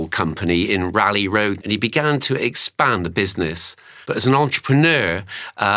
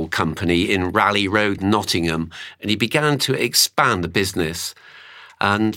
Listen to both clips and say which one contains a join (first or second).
first